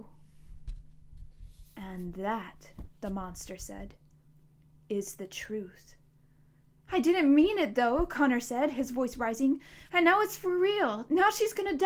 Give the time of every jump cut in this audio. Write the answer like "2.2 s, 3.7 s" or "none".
9.9 s